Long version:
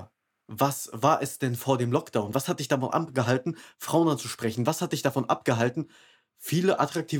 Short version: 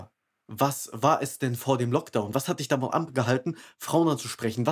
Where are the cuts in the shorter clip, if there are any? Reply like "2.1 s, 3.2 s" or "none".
none